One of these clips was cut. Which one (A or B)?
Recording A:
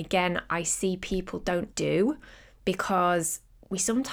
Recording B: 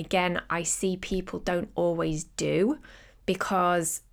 A